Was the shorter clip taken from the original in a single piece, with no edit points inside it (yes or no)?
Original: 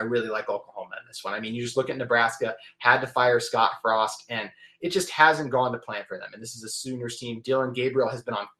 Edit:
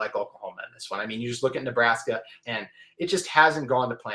no